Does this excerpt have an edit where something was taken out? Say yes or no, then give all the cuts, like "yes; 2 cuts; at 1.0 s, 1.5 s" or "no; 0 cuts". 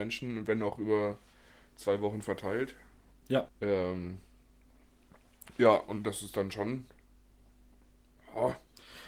yes; 1 cut; at 3.5 s